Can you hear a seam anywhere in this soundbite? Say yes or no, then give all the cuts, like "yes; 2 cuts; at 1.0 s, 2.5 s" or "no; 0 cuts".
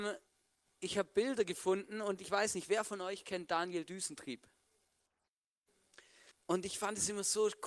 yes; 1 cut; at 6.3 s